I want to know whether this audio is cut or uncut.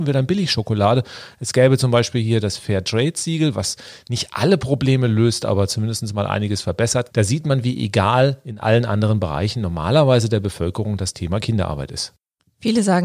cut